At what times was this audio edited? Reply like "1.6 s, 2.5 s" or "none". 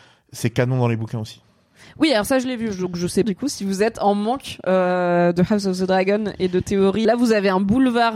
3.2 s, 7.0 s